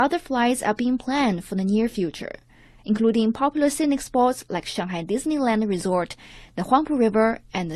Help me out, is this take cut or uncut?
uncut